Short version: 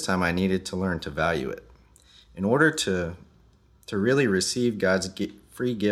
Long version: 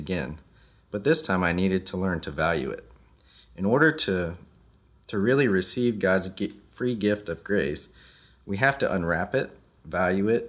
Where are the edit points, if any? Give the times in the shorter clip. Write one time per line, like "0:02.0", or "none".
none